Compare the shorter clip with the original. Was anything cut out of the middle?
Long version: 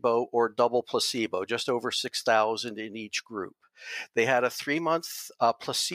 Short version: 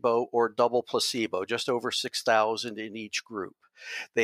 no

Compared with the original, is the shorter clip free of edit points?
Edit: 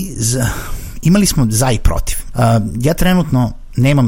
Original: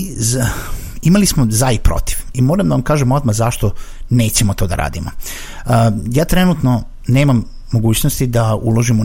no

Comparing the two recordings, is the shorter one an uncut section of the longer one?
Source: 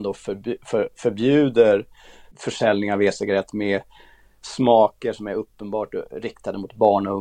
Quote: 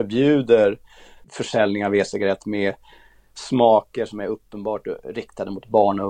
yes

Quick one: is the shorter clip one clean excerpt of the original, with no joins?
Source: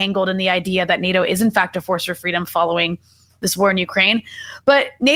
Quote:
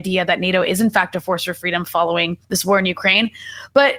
no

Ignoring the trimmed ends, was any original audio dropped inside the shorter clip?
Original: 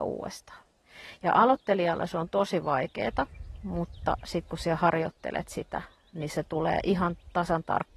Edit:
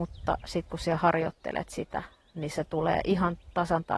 no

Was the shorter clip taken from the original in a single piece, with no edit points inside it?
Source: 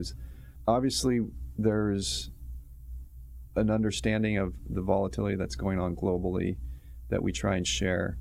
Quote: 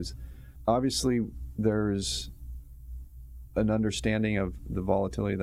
yes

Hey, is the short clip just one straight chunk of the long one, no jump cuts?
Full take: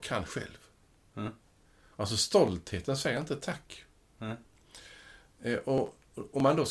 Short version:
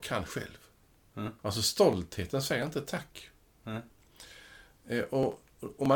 no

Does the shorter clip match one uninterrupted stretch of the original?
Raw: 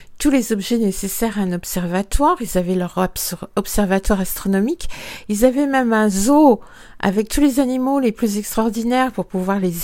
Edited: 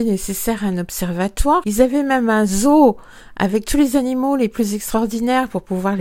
no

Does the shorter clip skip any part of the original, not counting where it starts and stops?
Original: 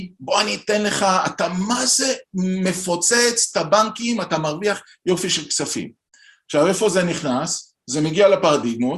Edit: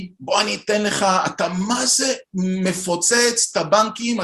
no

